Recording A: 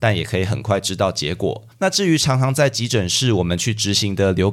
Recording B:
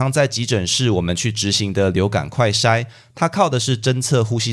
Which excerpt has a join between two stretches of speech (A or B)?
A